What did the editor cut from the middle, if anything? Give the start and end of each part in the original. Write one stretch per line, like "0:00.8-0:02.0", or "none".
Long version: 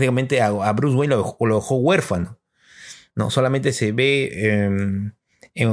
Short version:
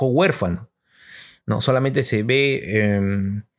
none